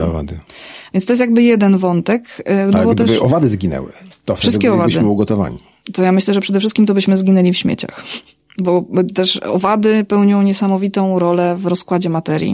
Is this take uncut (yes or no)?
yes